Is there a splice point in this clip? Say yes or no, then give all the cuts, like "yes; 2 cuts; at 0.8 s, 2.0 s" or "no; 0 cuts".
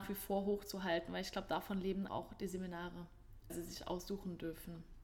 yes; 2 cuts; at 2.1 s, 3.5 s